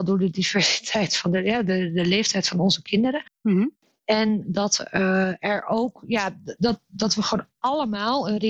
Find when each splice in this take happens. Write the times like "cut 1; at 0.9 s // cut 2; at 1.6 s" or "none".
none